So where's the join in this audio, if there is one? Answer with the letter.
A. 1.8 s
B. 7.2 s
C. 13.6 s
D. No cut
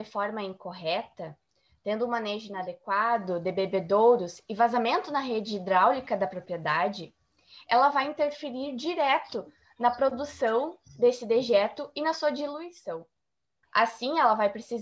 C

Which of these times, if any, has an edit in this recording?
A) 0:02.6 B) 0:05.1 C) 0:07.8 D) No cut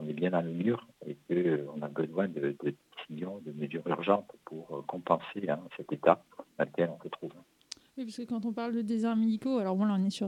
D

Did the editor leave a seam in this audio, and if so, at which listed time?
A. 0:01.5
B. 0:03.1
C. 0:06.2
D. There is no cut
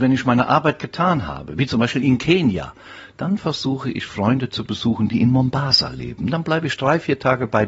D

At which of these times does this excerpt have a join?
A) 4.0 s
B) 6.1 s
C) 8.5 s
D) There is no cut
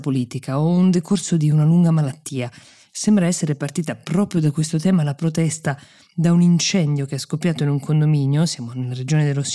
D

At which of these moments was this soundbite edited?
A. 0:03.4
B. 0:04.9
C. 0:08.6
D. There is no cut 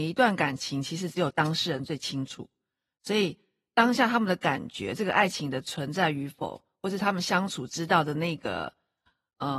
D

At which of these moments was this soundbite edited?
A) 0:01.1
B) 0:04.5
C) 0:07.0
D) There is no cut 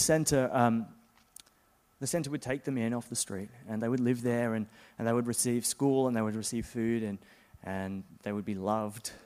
D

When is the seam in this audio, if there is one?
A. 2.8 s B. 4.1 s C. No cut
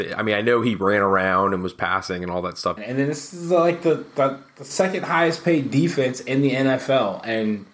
A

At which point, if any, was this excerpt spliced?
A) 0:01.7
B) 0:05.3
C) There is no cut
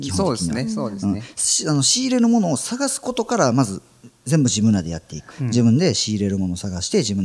B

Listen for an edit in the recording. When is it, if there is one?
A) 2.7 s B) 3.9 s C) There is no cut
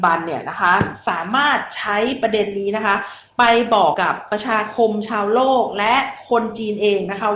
B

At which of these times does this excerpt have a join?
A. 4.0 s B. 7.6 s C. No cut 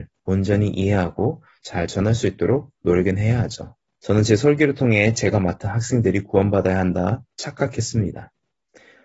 A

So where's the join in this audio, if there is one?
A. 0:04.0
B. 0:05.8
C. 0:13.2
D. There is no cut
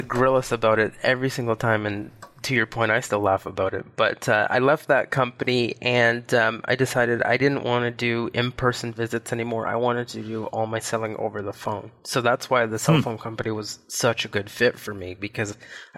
D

